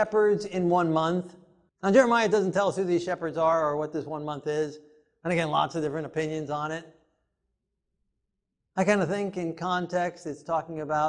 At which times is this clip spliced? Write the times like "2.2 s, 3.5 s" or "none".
1.7 s